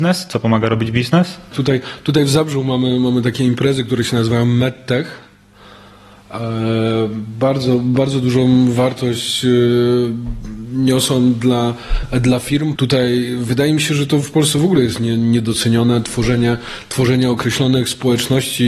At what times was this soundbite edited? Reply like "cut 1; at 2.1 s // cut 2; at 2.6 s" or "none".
cut 1; at 1.5 s // cut 2; at 12.8 s

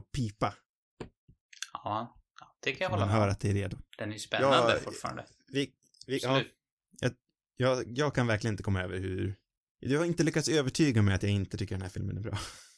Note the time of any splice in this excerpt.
cut 1; at 3.9 s

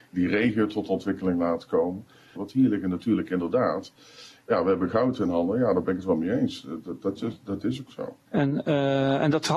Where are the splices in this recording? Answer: cut 1; at 2.4 s // cut 2; at 8.3 s

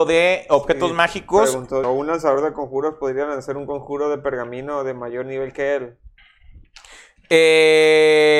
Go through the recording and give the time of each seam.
cut 1; at 1.8 s

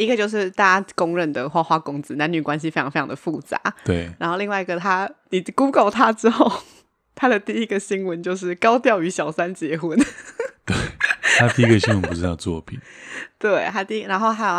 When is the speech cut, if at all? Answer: none

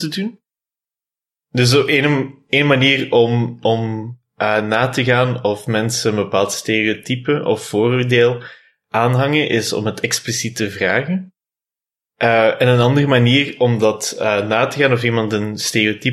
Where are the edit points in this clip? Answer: none

